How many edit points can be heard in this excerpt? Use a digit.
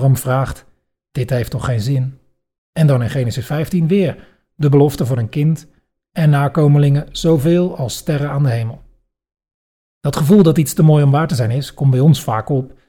2